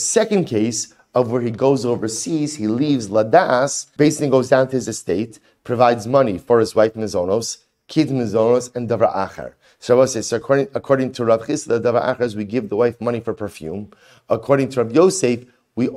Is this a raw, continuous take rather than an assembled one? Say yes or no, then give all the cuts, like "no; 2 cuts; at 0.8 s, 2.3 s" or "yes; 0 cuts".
no; 1 cut; at 4.0 s